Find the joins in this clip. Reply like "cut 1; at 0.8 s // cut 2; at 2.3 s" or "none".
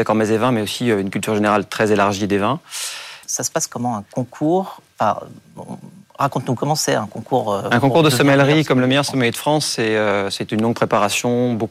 cut 1; at 3.2 s

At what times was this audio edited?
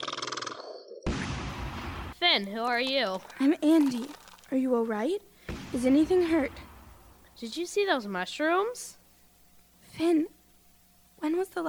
cut 1; at 2.1 s // cut 2; at 9.7 s

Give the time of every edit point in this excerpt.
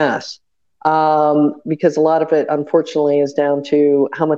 none

